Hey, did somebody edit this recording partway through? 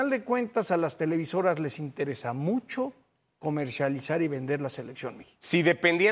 no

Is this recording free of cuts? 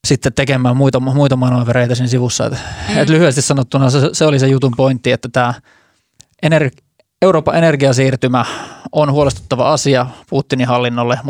yes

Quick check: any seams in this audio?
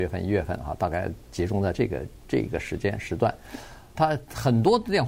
yes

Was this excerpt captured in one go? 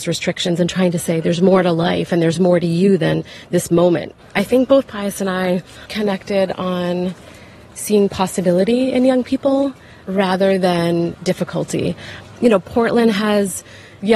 no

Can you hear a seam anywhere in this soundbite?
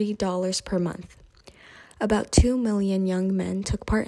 no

